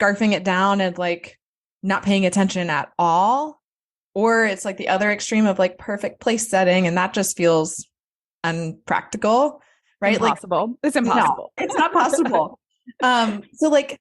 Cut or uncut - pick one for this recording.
cut